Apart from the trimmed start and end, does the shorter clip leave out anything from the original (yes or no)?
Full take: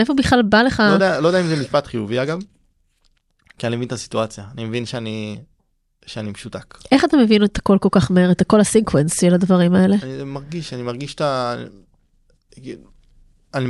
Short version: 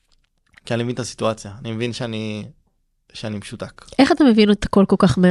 no